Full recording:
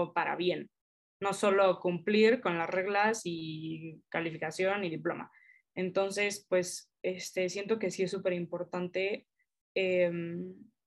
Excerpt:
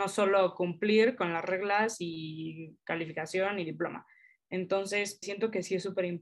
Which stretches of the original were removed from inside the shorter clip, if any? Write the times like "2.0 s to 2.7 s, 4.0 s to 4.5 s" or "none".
6.5 s to 7.5 s